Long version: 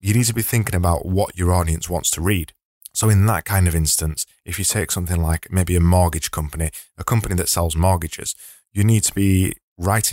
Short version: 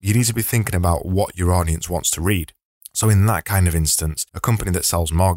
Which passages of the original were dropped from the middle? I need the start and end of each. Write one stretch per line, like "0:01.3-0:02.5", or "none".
0:04.3-0:06.9